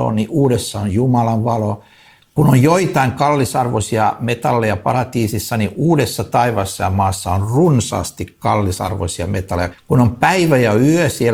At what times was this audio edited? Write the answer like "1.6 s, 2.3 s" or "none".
9.7 s